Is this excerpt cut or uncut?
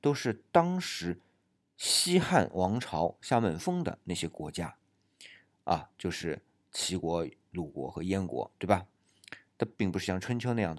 cut